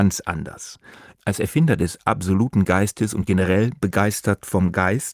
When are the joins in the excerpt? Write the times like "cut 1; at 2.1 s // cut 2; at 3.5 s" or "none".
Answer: cut 1; at 1.1 s